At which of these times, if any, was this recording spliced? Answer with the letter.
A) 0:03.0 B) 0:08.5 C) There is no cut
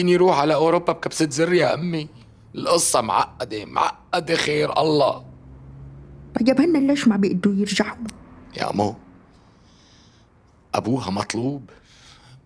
C